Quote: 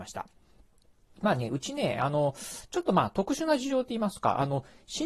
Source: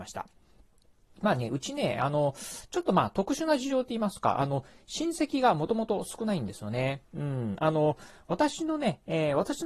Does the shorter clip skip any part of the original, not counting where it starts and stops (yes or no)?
no